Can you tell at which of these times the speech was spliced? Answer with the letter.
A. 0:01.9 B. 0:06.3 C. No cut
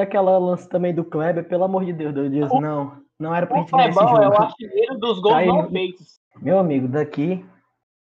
B